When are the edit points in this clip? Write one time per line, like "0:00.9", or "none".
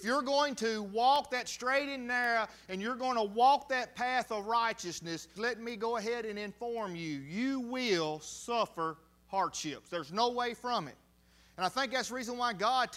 0:05.4